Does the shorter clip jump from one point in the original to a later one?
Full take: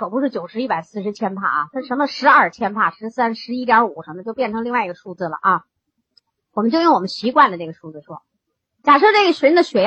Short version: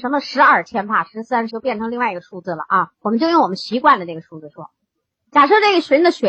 yes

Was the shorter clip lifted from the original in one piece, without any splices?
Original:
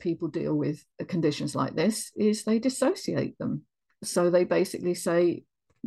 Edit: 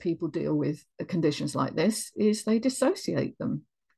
yes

